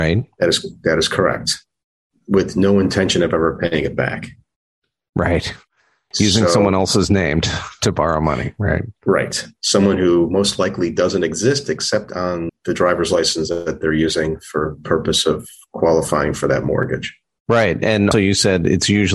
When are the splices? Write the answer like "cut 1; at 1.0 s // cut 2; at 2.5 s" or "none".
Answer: cut 1; at 12.5 s // cut 2; at 18.1 s

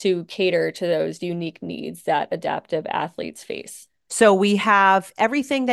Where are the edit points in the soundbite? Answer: cut 1; at 4.1 s

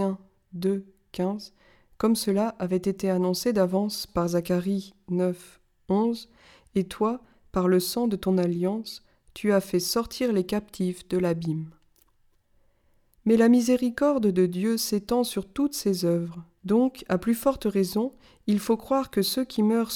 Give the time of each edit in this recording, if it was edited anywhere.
cut 1; at 16.6 s

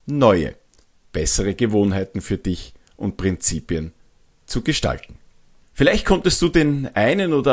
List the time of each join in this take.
cut 1; at 5.6 s

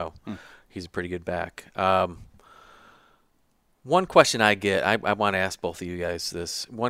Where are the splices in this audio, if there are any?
none

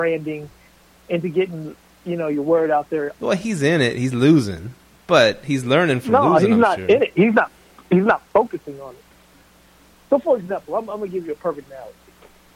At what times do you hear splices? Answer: cut 1; at 3.1 s

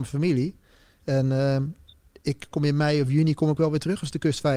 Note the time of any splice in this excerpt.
cut 1; at 2.5 s

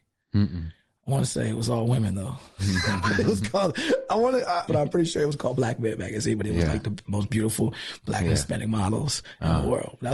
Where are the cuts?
cut 1; at 4.7 s

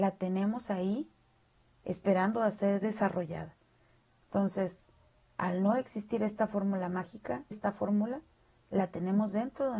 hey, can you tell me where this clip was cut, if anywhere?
cut 1; at 4.2 s // cut 2; at 7.5 s

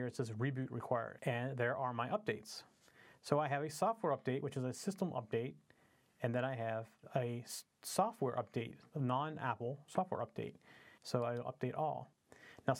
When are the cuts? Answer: cut 1; at 1.2 s // cut 2; at 11.0 s

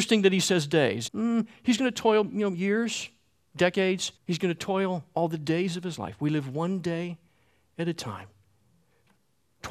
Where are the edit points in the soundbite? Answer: cut 1; at 1.1 s // cut 2; at 4.2 s

